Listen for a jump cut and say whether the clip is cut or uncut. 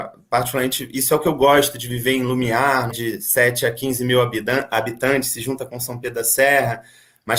cut